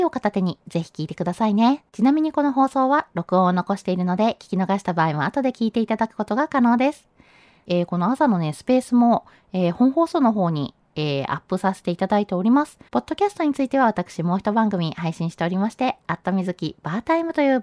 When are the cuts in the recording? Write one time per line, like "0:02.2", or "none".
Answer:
0:01.9
0:07.7
0:12.9